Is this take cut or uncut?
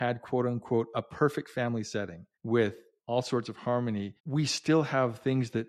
cut